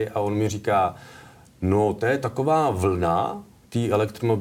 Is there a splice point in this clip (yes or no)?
no